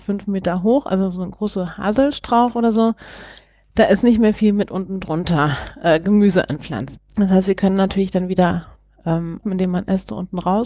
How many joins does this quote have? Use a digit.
2